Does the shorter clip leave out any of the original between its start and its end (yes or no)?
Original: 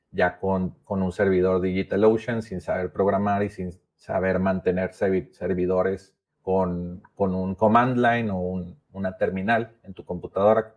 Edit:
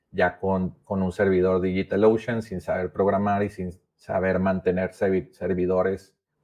no